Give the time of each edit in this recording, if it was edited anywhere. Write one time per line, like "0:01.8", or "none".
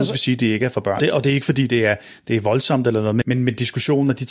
0:01.0
0:03.2